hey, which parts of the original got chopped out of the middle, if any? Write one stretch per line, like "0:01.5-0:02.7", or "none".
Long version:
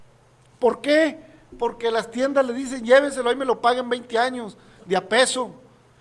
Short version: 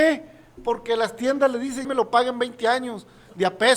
0:02.8-0:03.4